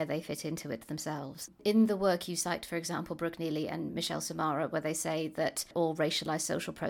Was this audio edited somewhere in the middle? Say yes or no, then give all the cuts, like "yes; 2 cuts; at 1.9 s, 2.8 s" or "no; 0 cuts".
no; 0 cuts